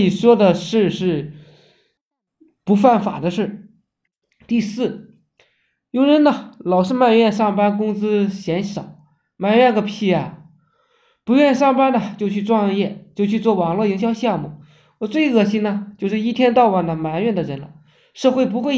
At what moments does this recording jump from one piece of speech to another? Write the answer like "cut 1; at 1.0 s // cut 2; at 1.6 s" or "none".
none